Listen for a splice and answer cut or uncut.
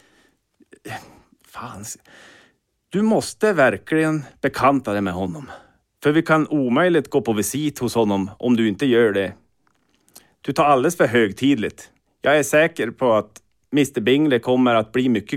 uncut